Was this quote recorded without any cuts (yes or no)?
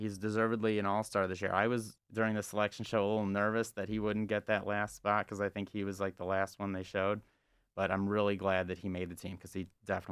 no